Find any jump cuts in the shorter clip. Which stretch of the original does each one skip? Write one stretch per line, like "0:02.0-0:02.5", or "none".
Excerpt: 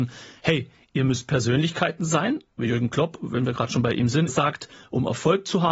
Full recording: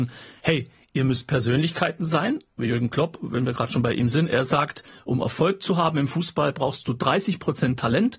0:04.3-0:04.4